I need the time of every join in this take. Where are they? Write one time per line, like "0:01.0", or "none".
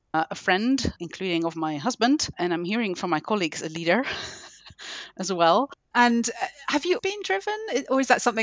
0:05.9
0:07.0

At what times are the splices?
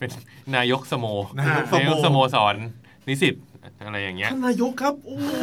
none

